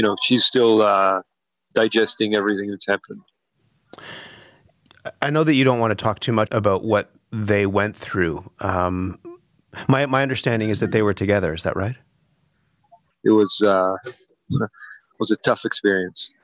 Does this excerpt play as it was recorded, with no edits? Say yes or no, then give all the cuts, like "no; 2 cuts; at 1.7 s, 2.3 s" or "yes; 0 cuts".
no; 3 cuts; at 6.5 s, 13.1 s, 15.1 s